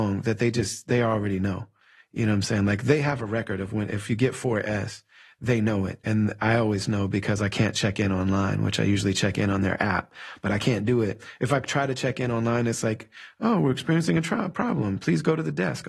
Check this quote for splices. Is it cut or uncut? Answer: uncut